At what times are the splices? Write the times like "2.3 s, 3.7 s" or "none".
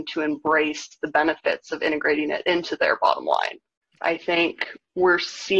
4.0 s